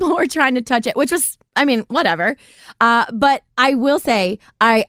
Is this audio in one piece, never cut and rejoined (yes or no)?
yes